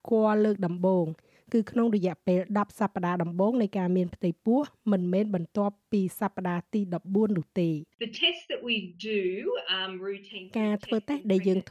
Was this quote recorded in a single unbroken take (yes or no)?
no